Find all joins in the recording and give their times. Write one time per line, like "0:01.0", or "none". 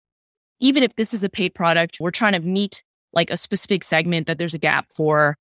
0:02.0